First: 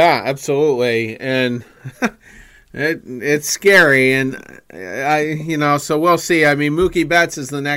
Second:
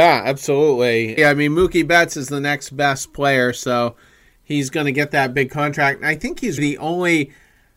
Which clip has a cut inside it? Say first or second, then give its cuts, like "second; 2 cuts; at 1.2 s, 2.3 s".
second; 2 cuts; at 1.2 s, 6.6 s